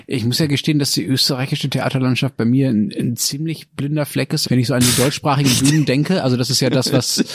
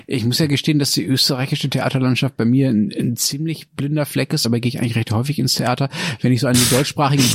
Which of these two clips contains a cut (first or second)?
first